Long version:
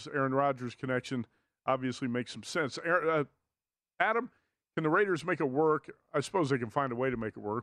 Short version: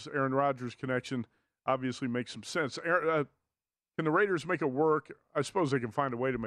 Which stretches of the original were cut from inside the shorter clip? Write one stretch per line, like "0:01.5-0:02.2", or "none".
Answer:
0:03.9-0:04.7